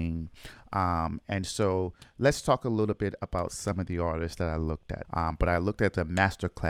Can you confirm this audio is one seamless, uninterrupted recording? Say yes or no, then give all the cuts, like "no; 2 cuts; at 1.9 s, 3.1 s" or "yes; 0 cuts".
no; 1 cut; at 5.0 s